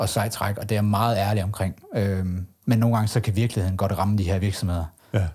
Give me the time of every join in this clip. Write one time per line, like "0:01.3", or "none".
none